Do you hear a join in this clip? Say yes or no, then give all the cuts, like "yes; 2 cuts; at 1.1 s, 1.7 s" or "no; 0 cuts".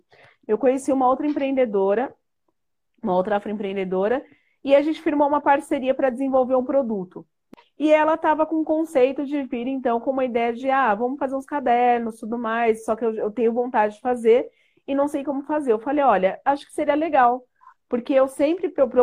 no; 0 cuts